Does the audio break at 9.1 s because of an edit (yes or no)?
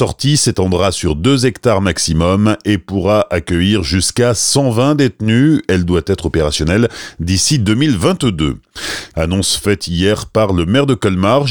yes